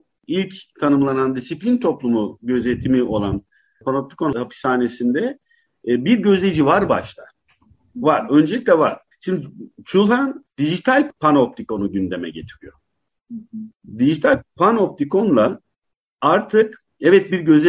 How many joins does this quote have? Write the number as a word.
one